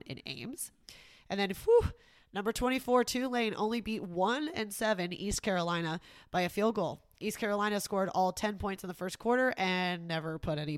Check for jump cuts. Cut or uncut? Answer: uncut